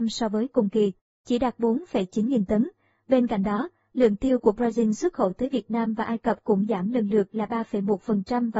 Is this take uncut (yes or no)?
yes